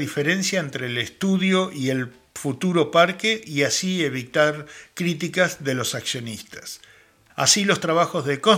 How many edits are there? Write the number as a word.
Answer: one